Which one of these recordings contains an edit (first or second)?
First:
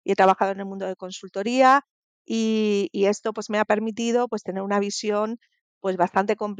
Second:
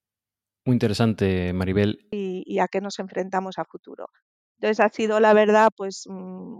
second